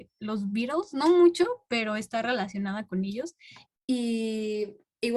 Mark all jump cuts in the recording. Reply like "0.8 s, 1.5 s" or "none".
3.7 s